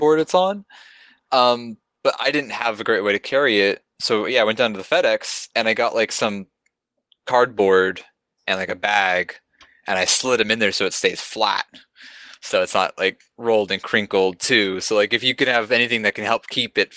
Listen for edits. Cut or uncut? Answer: uncut